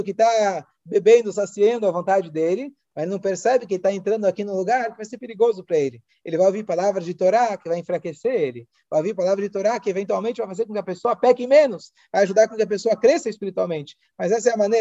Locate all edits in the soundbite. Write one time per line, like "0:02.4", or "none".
none

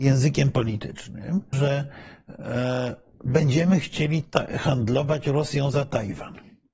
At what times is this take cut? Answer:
0:01.5

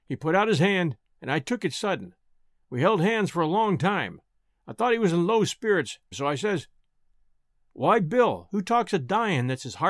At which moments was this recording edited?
0:06.1

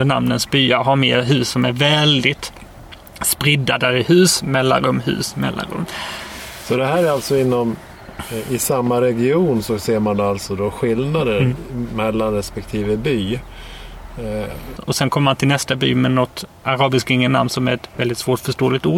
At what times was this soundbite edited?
0:14.8

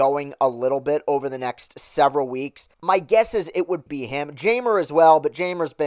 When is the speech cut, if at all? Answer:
0:02.7
0:03.9

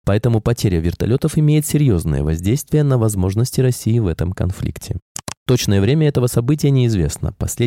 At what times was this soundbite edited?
0:05.3

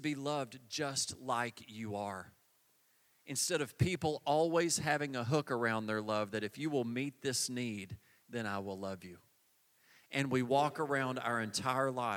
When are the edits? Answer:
none

